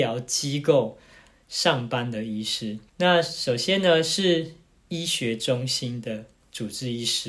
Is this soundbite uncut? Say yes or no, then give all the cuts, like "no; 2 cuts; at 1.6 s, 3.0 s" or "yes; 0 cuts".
no; 1 cut; at 2.9 s